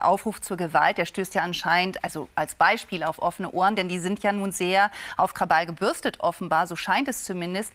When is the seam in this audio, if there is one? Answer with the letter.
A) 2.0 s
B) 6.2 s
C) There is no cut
C